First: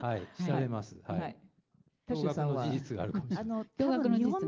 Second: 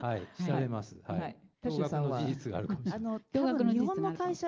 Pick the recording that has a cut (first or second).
second